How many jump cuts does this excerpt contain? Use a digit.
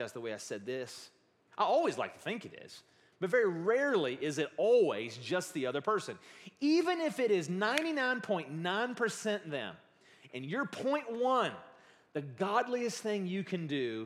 1